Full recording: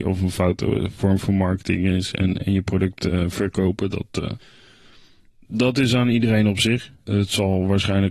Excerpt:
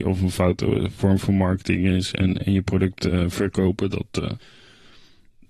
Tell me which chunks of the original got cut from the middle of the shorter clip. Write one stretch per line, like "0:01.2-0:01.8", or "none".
none